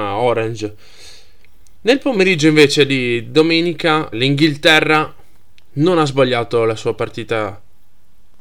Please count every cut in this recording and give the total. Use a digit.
1